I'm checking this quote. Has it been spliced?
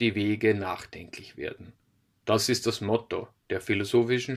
no; 0 cuts

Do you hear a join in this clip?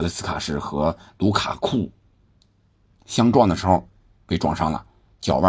no; 0 cuts

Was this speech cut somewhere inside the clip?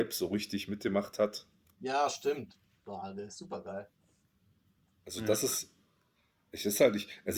yes; 1 cut; at 1.7 s

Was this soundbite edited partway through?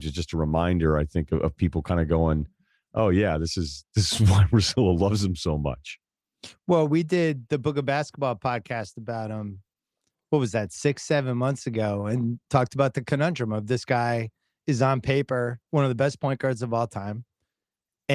yes; 1 cut; at 15.6 s

